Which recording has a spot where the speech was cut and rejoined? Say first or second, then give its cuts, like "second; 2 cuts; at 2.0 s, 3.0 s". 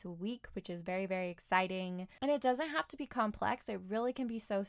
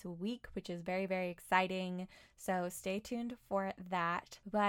first; 1 cut; at 2.2 s